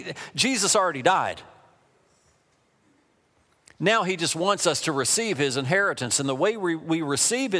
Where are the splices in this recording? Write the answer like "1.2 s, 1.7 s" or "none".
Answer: none